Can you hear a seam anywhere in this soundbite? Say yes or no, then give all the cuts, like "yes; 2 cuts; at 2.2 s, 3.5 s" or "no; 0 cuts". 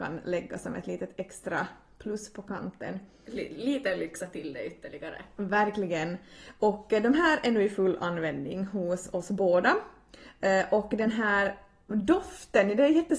no; 0 cuts